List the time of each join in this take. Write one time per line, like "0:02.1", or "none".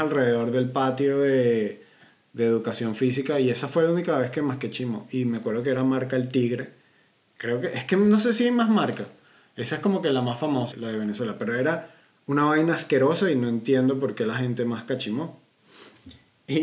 0:10.7